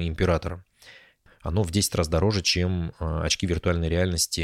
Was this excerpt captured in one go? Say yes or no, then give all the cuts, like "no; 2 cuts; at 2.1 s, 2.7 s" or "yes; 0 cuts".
no; 1 cut; at 1.3 s